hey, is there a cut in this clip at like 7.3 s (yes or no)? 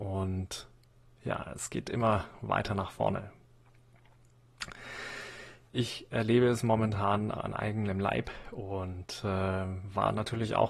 yes